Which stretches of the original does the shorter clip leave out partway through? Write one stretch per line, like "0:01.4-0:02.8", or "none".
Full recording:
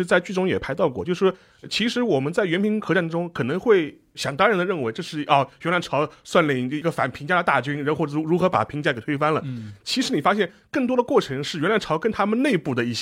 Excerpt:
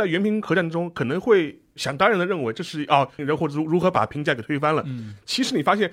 0:05.6-0:07.8

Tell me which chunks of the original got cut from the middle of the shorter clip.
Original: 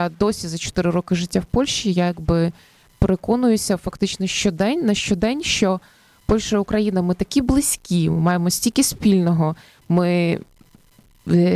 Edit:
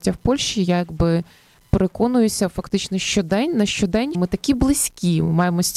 0:05.4-0:07.0

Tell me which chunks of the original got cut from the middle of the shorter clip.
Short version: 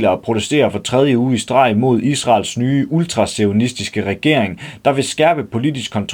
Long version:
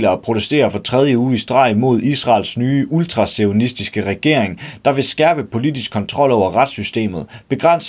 none

